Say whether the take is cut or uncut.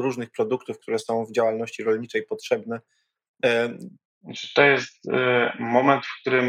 cut